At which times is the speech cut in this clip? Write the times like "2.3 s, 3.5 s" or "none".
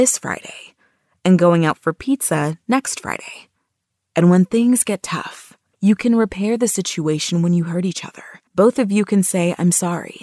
5.7 s, 8.5 s